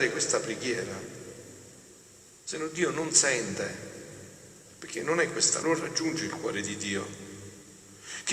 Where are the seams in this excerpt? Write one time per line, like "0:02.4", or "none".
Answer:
0:05.6